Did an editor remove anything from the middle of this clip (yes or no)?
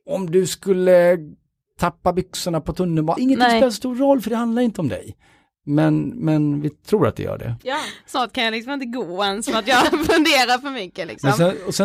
yes